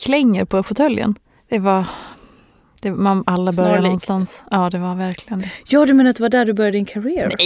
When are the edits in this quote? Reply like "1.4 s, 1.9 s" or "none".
1.4 s